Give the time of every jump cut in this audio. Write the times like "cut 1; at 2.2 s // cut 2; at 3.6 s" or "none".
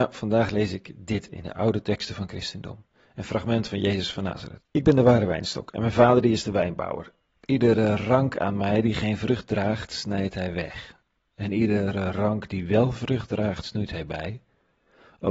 cut 1; at 4.6 s

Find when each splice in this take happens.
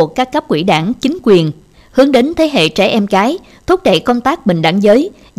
cut 1; at 1.7 s

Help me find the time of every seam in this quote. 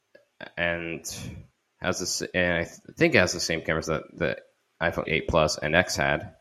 cut 1; at 5.0 s

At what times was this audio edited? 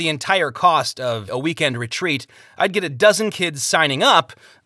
cut 1; at 1.3 s

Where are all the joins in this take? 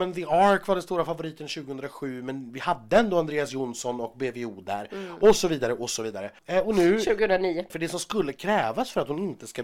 cut 1; at 6.4 s // cut 2; at 7.7 s

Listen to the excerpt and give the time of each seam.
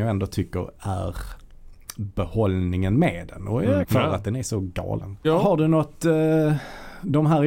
cut 1; at 3.8 s // cut 2; at 5.2 s

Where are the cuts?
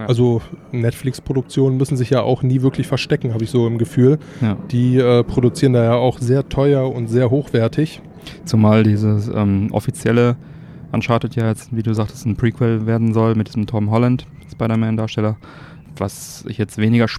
none

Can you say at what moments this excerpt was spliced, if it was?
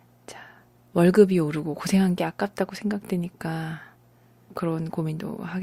cut 1; at 4.5 s

